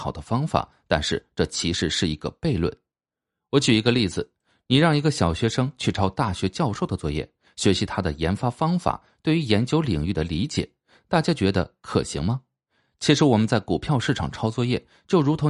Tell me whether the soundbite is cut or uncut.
uncut